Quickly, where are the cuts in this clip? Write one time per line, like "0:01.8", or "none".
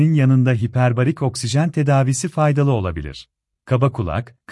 0:03.6